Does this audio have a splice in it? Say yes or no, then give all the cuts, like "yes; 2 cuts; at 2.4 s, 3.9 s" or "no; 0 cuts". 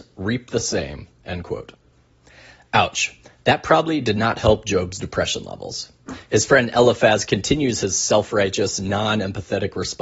no; 0 cuts